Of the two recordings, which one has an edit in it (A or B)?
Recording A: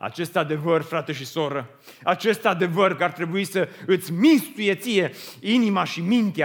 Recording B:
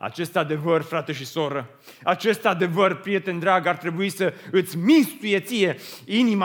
A